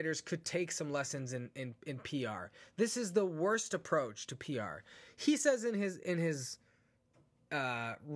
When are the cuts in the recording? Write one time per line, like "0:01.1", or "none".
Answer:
none